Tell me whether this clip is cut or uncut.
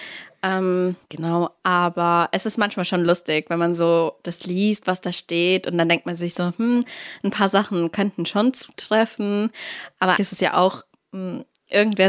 cut